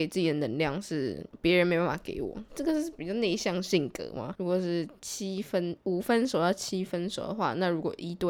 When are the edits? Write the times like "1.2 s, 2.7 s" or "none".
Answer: 4.3 s